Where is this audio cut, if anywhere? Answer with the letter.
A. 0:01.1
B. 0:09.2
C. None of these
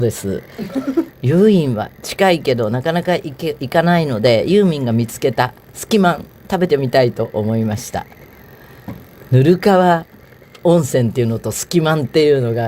A